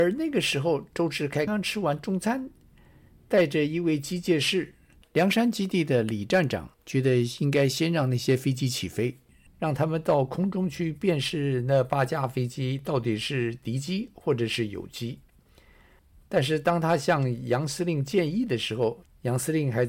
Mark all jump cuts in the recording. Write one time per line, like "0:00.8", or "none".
0:01.5
0:05.0
0:06.7